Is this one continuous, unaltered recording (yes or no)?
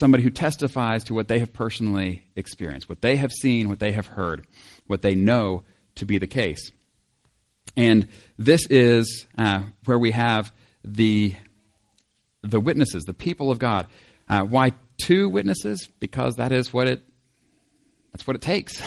yes